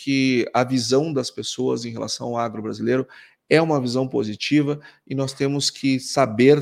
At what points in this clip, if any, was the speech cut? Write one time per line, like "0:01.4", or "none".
none